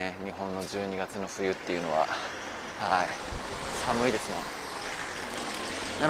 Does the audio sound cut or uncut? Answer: uncut